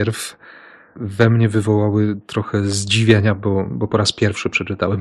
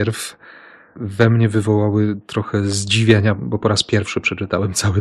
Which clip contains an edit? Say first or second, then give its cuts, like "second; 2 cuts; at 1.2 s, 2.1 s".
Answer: second; 1 cut; at 3.4 s